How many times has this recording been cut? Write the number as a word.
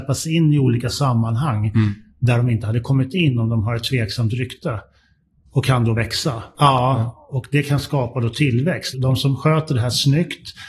two